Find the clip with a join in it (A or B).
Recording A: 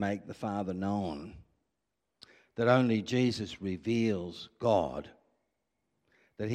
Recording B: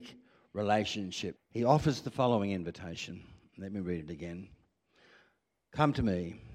B